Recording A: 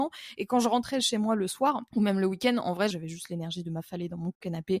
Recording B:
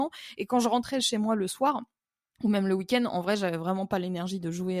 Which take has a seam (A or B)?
A